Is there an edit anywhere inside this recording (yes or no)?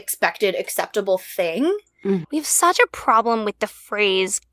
yes